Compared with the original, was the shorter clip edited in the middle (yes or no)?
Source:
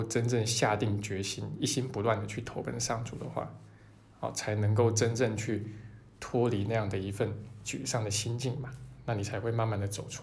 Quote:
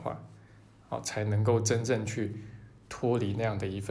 no